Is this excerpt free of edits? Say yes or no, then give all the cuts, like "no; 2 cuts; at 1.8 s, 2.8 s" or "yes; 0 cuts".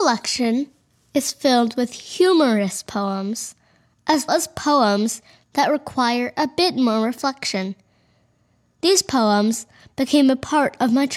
no; 1 cut; at 4.3 s